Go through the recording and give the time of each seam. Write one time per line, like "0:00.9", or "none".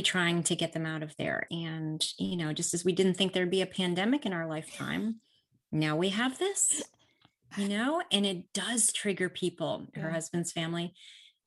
0:01.5
0:09.9

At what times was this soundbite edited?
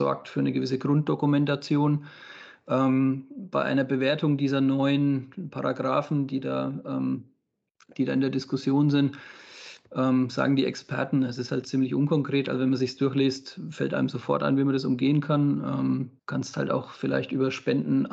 0:16.2

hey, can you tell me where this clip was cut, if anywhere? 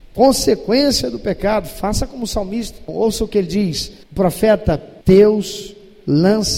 0:02.9
0:05.0

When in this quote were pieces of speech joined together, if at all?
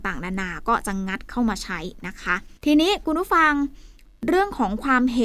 0:02.6

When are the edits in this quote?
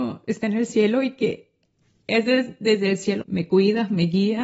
0:03.2

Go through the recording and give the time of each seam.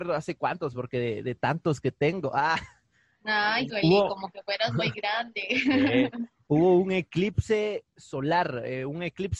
0:03.7

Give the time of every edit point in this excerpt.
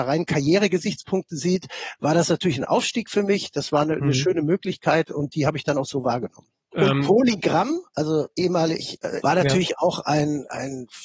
0:06.7
0:09.2

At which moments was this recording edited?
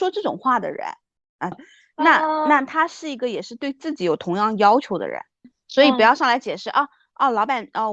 0:01.5
0:05.4

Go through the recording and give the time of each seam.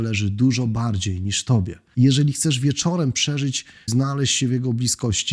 0:01.9
0:03.9

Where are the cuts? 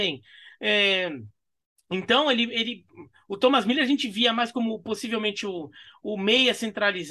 none

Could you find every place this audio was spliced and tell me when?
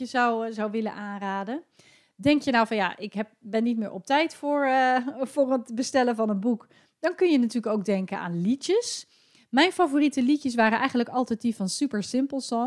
none

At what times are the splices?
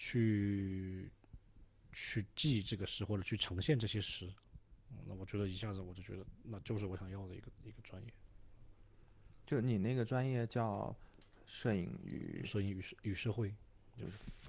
none

